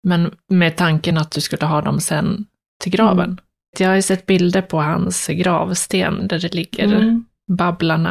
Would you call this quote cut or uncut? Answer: cut